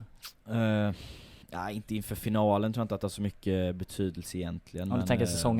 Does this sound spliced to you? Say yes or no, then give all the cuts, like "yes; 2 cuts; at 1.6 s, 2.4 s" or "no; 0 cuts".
yes; 1 cut; at 1.4 s